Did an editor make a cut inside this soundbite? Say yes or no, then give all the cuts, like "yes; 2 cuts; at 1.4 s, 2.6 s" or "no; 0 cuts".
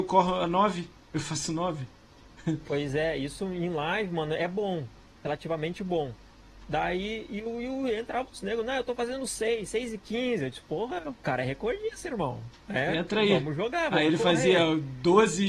no; 0 cuts